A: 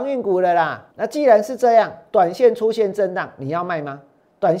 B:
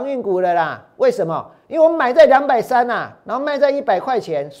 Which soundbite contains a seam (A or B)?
A